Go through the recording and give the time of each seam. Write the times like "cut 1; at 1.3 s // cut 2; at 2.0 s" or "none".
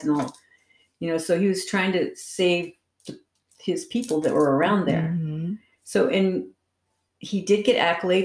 none